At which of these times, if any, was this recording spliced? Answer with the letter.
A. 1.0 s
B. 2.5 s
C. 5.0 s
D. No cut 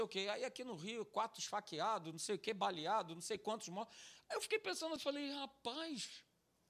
C